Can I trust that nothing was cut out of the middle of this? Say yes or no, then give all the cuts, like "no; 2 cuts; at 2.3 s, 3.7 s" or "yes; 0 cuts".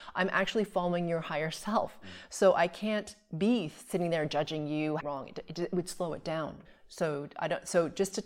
no; 2 cuts; at 5.0 s, 6.6 s